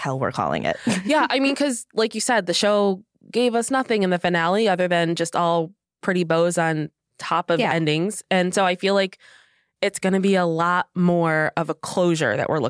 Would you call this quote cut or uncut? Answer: uncut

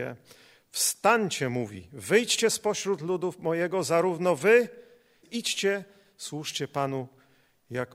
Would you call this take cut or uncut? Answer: cut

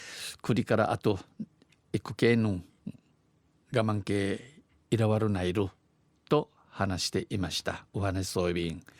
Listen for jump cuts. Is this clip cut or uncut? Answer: uncut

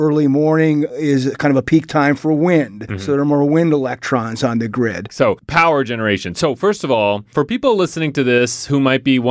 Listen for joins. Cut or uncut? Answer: cut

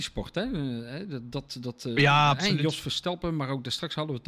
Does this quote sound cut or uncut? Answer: uncut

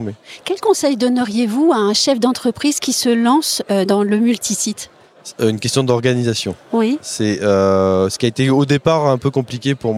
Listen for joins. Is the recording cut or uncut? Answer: cut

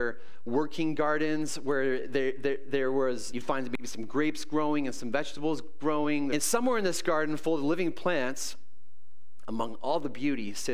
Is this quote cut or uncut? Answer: cut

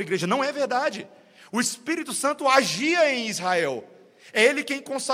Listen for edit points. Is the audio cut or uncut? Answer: uncut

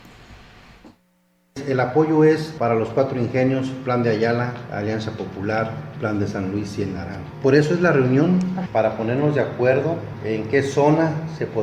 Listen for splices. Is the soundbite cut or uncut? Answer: uncut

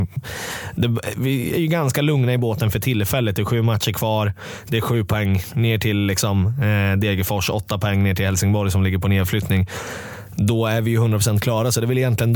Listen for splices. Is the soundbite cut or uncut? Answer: uncut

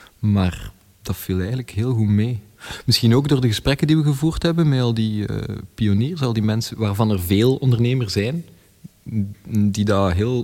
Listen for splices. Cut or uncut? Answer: uncut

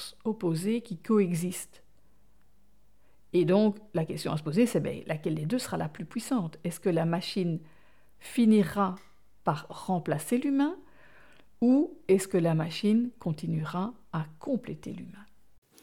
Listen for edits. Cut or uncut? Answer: uncut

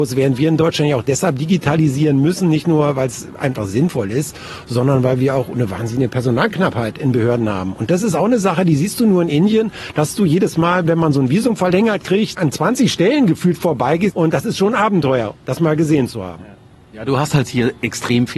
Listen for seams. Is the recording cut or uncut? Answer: cut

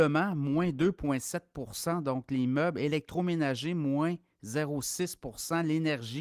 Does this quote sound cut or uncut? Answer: uncut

